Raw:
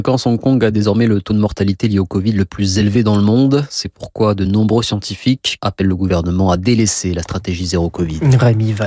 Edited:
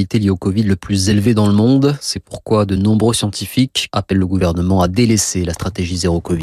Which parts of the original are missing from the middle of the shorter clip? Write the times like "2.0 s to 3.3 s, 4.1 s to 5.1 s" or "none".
none